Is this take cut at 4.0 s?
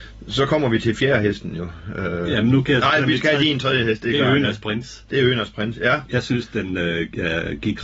no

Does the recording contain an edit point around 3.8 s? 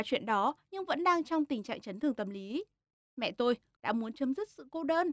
yes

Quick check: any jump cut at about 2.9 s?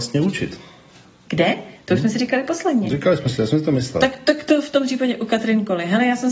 no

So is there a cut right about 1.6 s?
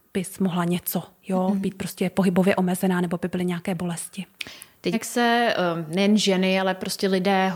no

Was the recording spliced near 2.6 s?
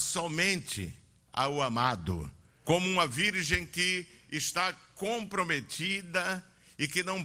yes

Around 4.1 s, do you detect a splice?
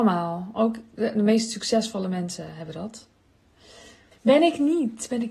yes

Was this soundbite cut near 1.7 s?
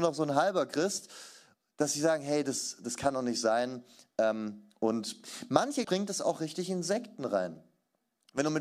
no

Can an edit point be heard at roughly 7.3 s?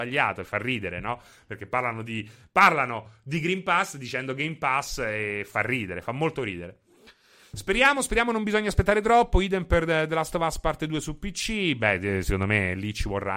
no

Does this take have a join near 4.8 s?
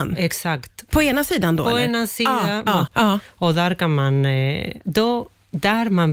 no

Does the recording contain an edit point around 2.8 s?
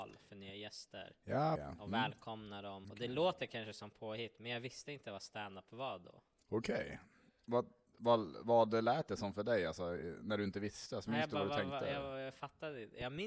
yes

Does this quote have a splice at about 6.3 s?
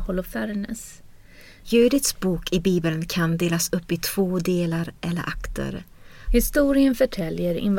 yes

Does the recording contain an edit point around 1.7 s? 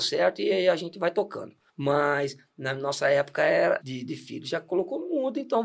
yes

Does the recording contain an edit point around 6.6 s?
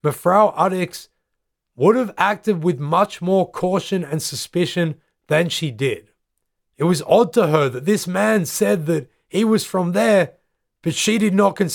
yes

